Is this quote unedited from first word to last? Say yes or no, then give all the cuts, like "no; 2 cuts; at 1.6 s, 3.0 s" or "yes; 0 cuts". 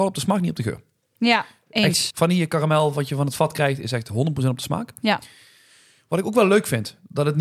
no; 1 cut; at 2.1 s